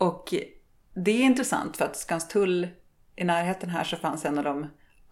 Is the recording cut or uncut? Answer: uncut